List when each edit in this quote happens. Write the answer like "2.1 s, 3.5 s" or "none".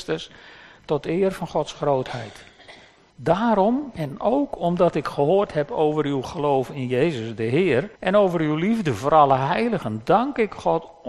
3.1 s, 7.9 s

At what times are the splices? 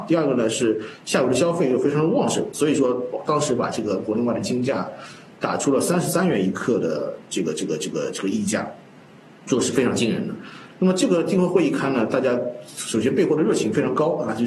10.7 s

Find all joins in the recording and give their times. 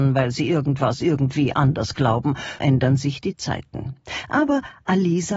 2.6 s

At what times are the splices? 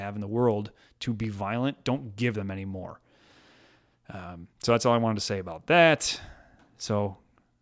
4.5 s

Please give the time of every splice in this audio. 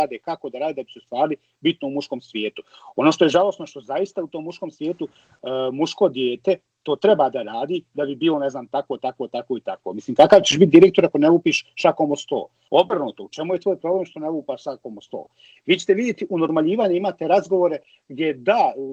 12.7 s

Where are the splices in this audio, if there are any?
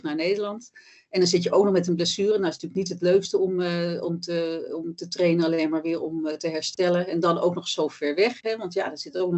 none

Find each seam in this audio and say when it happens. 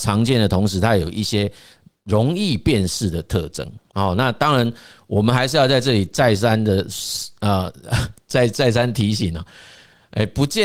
none

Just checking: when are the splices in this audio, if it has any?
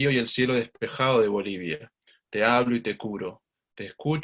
2.2 s

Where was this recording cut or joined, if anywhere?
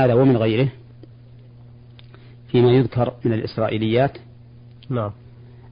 none

